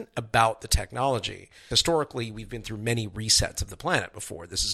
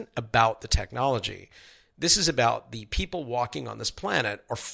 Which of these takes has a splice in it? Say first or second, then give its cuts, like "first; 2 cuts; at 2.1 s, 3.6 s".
first; 1 cut; at 1.7 s